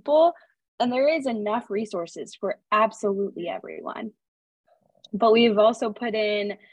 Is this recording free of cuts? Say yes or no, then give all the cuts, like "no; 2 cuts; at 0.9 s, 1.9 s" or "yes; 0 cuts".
yes; 0 cuts